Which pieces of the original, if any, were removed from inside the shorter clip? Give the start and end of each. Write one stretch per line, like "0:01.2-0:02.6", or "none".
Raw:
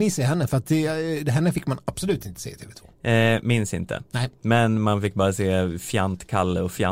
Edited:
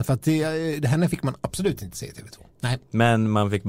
0:03.0-0:04.1